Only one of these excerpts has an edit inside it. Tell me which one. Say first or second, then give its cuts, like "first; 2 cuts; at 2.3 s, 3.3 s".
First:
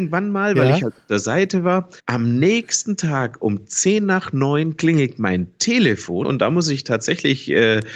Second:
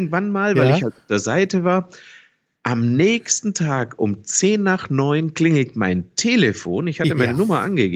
first; 2 cuts; at 2.0 s, 6.2 s